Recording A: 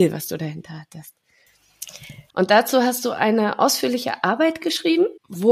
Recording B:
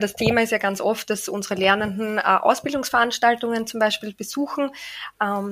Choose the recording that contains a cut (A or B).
A